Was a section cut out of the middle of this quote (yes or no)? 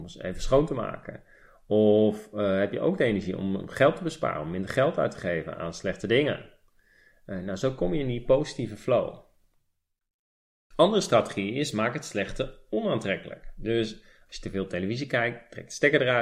no